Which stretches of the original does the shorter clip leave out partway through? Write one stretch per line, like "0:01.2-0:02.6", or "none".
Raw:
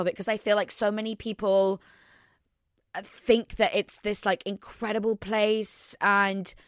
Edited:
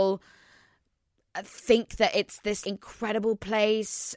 0:04.2-0:04.4